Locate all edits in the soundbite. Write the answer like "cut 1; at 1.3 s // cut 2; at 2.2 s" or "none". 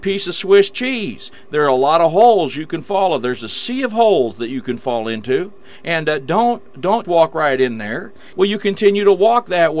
cut 1; at 7.0 s // cut 2; at 8.3 s